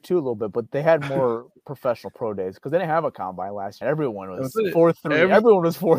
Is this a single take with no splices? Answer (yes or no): no